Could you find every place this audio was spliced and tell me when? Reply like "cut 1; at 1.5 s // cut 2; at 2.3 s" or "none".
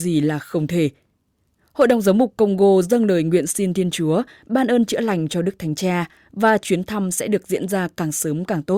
none